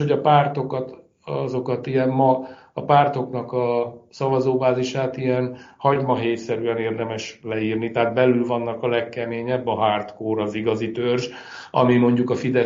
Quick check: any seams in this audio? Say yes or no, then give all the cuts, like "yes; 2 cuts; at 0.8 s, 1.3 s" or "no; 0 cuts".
no; 0 cuts